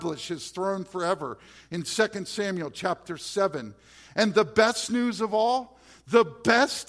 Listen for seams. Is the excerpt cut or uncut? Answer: uncut